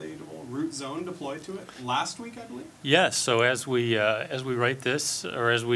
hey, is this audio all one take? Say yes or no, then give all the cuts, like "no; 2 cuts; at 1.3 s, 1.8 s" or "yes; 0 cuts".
yes; 0 cuts